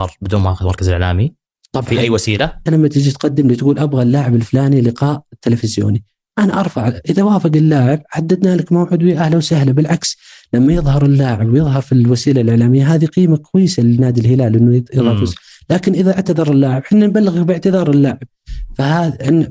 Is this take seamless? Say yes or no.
no